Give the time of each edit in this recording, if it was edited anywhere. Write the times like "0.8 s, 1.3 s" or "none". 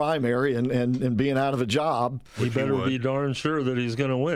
none